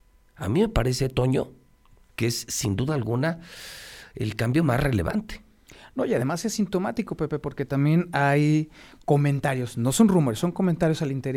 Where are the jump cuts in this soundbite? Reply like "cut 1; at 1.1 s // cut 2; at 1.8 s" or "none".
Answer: none